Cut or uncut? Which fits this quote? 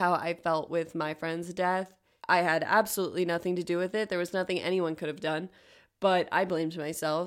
uncut